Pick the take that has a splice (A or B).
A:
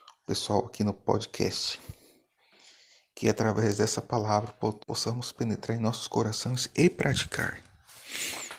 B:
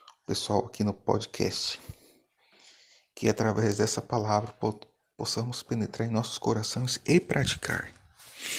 A